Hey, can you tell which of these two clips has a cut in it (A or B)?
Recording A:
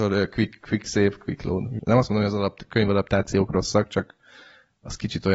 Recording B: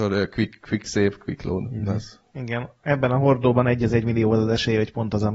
A